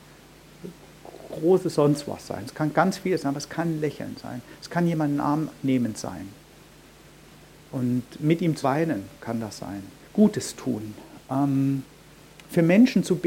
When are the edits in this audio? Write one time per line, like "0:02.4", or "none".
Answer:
0:08.6
0:10.0